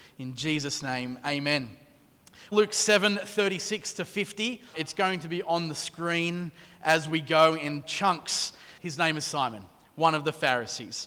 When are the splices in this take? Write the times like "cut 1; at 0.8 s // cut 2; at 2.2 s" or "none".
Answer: cut 1; at 2.5 s // cut 2; at 4.7 s // cut 3; at 8.8 s

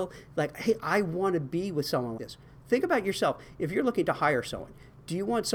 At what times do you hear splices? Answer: cut 1; at 2.2 s

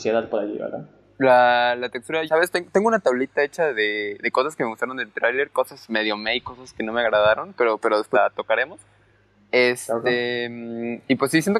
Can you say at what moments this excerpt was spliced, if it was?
cut 1; at 2.3 s // cut 2; at 8.1 s

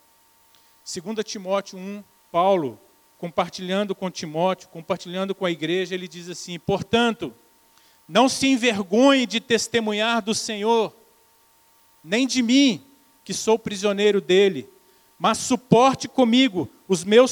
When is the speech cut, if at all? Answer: cut 1; at 2.2 s

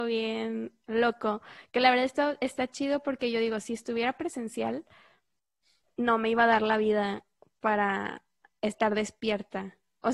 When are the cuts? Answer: none

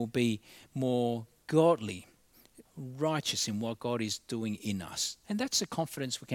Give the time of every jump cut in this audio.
cut 1; at 2.7 s // cut 2; at 5.2 s

